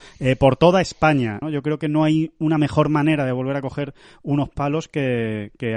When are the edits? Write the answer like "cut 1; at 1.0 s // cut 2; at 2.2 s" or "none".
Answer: cut 1; at 1.4 s